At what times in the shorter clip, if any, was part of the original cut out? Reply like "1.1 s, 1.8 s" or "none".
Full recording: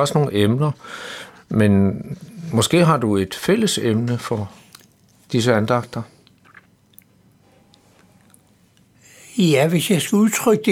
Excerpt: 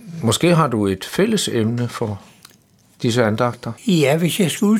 3.8 s